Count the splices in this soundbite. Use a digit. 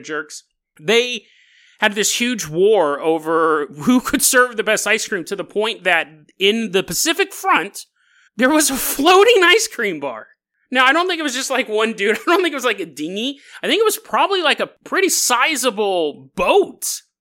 1